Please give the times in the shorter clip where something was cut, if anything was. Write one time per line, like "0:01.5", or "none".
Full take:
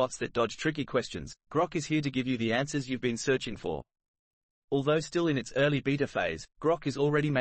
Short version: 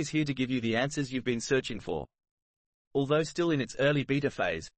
none